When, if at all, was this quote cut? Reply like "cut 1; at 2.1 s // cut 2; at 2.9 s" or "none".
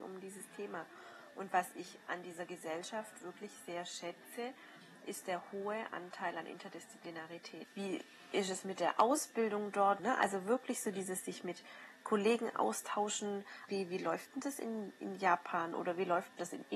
cut 1; at 7.6 s // cut 2; at 10.0 s // cut 3; at 13.7 s